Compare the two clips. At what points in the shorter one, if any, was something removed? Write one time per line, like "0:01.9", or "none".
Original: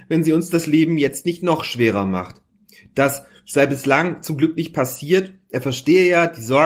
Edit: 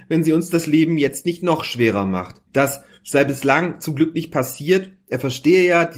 0:02.5